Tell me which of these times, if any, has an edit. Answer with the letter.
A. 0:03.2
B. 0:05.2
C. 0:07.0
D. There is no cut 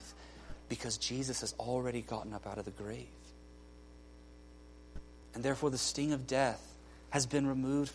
D